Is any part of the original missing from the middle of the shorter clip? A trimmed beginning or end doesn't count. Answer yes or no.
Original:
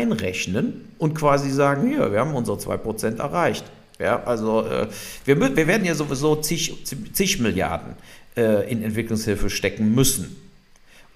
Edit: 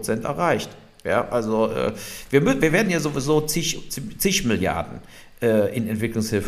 no